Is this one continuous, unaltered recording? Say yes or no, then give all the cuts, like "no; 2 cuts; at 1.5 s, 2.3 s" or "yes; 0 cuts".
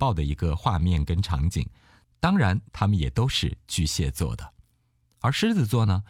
no; 1 cut; at 2.6 s